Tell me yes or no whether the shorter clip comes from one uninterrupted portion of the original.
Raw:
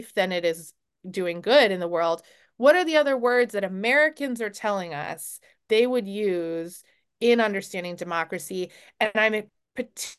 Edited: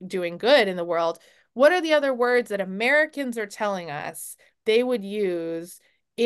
yes